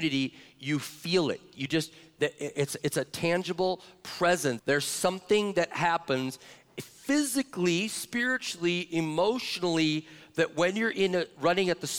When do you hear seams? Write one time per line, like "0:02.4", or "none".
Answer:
0:04.6